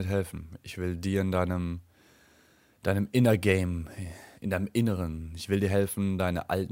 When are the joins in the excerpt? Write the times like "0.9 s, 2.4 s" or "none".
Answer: 4.3 s